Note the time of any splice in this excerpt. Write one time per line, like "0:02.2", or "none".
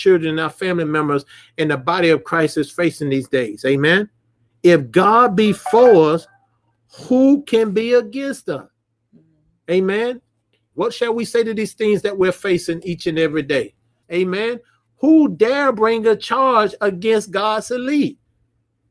0:10.7
0:14.0